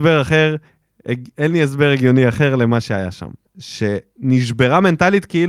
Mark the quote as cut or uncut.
cut